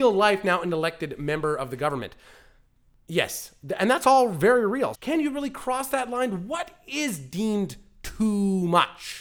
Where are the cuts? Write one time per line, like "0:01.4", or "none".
0:04.9